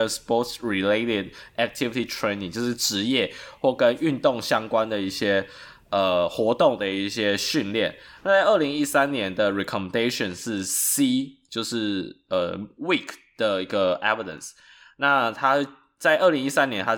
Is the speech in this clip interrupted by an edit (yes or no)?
no